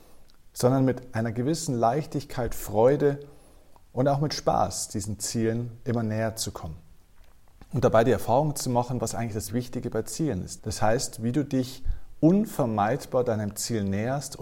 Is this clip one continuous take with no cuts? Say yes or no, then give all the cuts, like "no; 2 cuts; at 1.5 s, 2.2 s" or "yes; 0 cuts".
no; 2 cuts; at 9.5 s, 10.6 s